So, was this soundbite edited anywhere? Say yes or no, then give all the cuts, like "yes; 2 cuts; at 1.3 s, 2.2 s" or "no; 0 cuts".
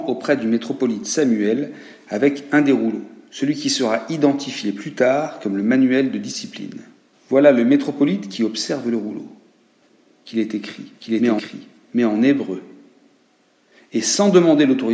no; 0 cuts